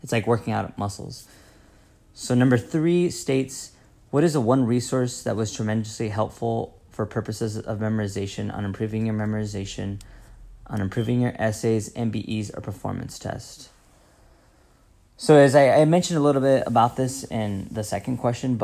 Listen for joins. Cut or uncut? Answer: uncut